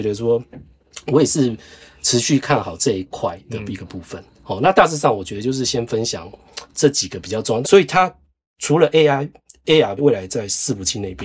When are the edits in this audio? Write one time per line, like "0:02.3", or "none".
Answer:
0:07.6
0:10.0